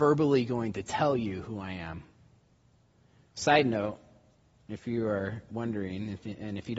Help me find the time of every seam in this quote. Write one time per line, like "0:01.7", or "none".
none

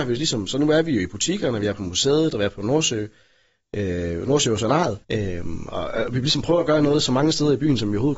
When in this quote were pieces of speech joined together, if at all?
0:05.0

